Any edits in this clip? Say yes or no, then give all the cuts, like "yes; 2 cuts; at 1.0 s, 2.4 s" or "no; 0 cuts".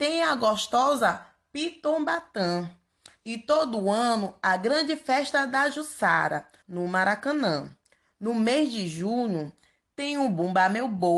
yes; 1 cut; at 6.6 s